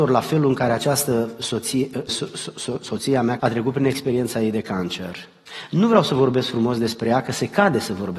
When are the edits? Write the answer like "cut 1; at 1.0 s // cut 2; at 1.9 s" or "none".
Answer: cut 1; at 2.1 s // cut 2; at 3.4 s